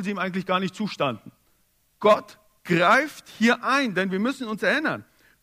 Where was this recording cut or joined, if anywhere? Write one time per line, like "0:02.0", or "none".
0:02.0